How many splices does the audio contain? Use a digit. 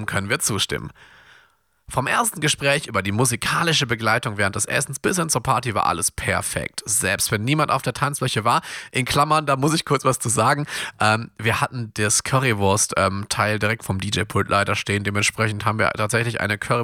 0